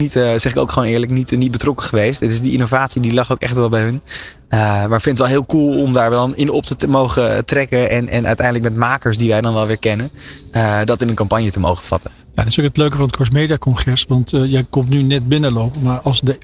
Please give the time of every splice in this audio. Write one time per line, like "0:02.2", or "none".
none